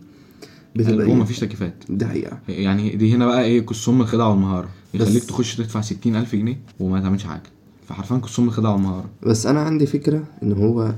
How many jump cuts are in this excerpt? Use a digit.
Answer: 2